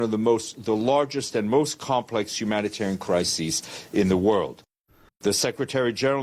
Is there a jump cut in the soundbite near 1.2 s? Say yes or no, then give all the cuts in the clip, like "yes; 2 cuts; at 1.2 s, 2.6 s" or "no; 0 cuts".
no; 1 cut; at 5.1 s